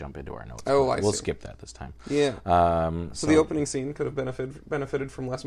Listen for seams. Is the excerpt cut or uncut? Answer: uncut